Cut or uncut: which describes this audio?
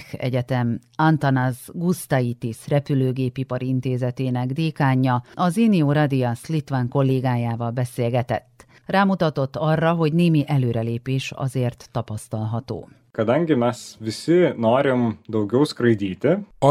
uncut